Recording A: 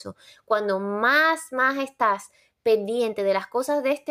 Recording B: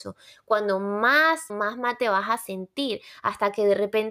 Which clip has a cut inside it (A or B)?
B